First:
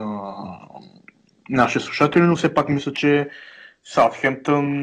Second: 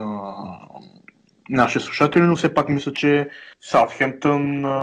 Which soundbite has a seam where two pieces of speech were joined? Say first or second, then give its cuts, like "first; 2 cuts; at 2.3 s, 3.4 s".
second; 1 cut; at 3.5 s